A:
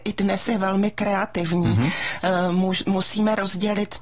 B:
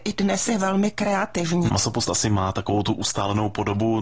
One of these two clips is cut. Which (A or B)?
B